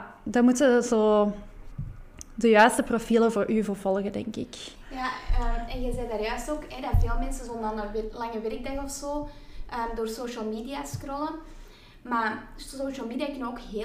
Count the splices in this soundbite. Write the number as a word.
zero